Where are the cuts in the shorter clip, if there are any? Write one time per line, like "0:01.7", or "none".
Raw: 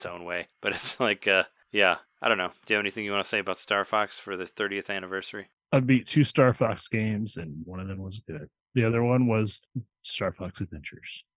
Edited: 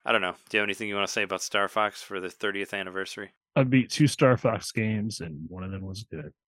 none

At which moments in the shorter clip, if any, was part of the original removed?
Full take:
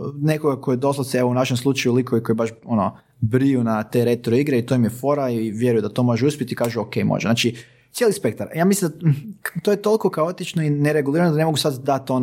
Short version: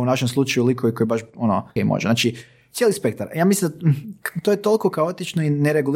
0:01.8

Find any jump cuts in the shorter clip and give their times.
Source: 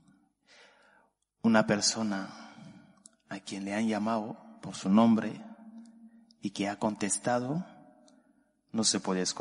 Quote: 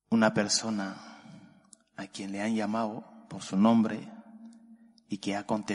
none

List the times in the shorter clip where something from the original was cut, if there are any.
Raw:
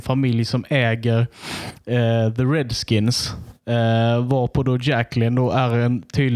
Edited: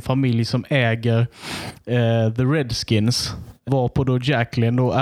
0:03.7

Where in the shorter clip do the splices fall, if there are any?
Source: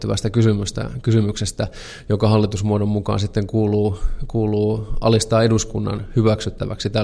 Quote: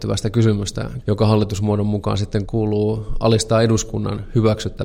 0:01.0
0:02.5

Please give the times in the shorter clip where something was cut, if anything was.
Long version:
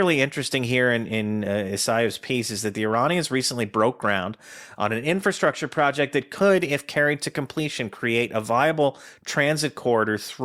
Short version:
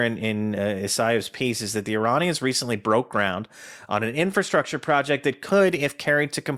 none

